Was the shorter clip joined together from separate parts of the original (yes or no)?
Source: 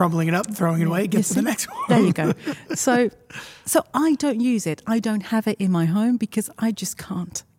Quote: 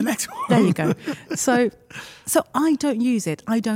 no